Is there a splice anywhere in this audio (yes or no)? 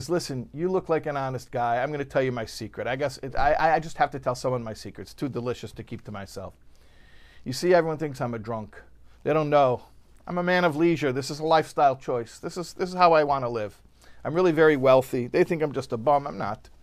no